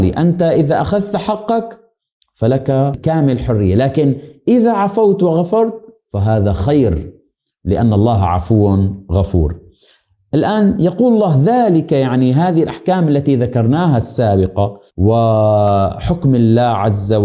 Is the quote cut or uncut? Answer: cut